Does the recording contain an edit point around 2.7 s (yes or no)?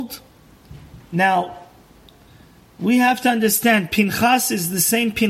no